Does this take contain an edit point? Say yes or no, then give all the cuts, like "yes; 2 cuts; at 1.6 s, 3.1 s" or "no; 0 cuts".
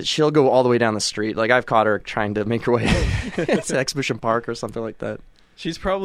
no; 0 cuts